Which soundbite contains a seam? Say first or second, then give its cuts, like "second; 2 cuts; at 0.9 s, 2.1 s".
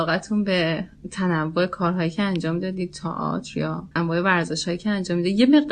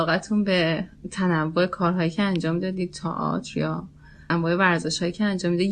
first; 1 cut; at 3.9 s